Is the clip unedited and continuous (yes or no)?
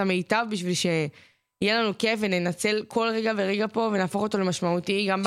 yes